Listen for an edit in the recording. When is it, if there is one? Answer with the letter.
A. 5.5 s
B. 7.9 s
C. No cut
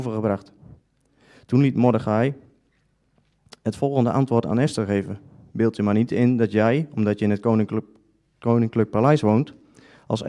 C